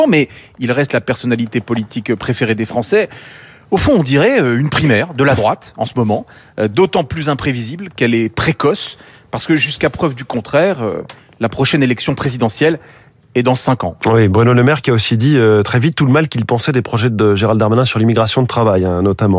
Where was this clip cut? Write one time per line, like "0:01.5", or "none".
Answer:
none

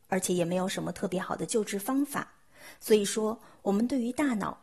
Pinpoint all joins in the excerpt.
none

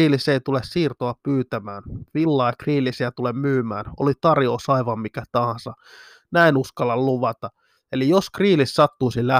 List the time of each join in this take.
none

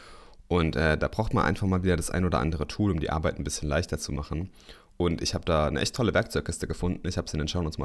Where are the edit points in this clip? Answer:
none

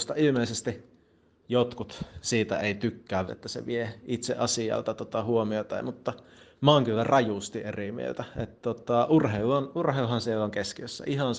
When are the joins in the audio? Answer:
0:03.3

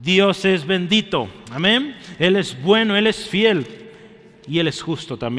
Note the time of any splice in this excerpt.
none

